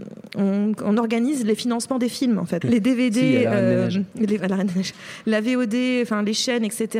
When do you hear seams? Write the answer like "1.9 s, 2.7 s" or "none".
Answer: 2.6 s